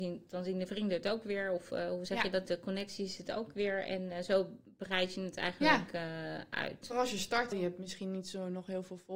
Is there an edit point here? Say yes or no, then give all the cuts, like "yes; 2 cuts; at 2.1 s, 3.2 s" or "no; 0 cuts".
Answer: yes; 1 cut; at 7.5 s